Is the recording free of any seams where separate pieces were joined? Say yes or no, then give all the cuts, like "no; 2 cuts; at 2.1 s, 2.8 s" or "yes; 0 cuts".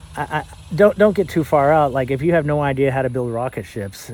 yes; 0 cuts